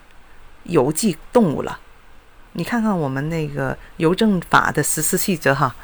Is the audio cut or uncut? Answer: uncut